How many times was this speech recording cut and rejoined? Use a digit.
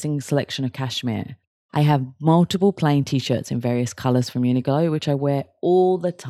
1